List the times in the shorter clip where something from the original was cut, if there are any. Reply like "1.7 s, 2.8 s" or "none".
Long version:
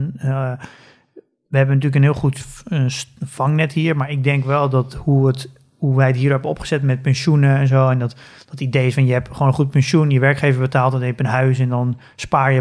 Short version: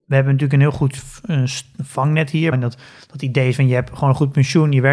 2.5 s

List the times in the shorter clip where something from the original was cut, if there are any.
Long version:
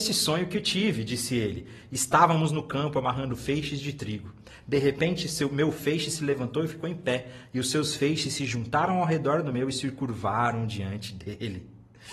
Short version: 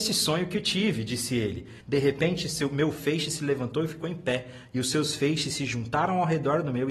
1.8 s

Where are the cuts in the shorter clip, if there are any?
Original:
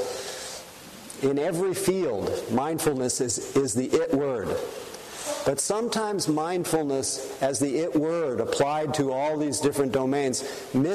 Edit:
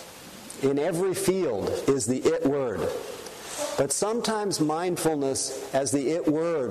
1.9 s

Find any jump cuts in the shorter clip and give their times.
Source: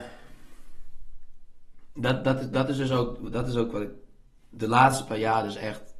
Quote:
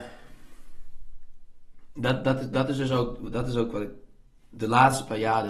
none

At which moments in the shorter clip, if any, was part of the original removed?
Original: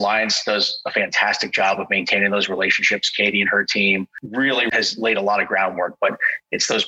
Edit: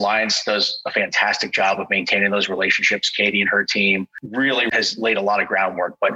none

